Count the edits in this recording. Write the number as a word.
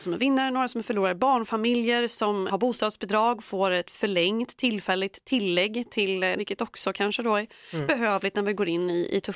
two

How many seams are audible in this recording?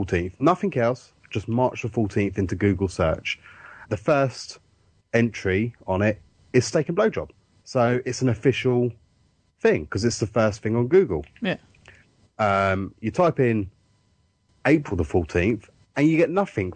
two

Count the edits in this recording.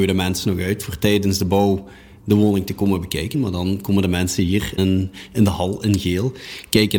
two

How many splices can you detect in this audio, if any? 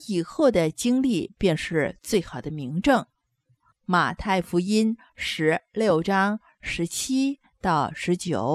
one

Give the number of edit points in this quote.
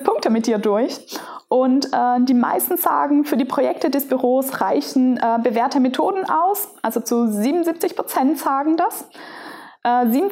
zero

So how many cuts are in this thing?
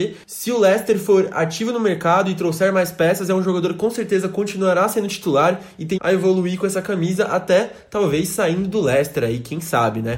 one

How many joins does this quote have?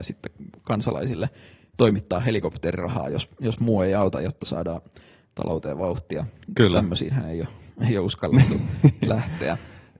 zero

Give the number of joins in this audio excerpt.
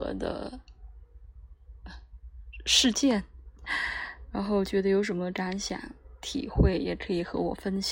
zero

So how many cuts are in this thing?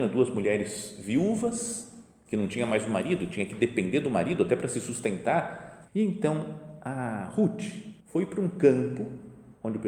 two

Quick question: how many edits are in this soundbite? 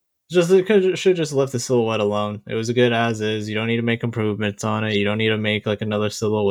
zero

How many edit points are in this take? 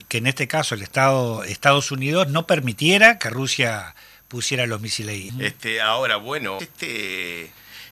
two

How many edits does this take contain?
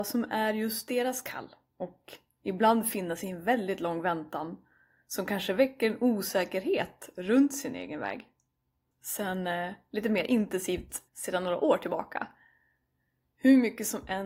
two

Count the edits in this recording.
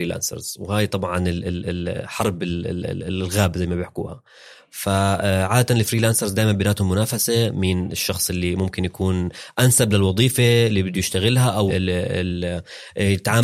one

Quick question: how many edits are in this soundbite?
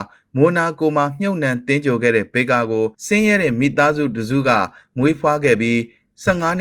one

